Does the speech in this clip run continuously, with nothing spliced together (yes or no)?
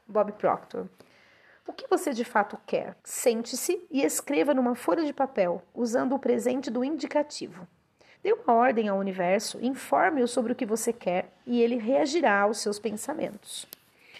no